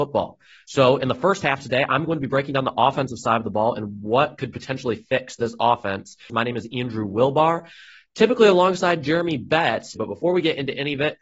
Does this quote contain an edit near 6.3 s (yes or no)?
yes